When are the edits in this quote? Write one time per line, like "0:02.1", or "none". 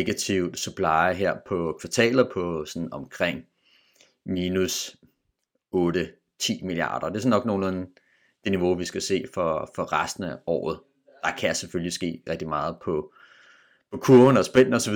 0:12.3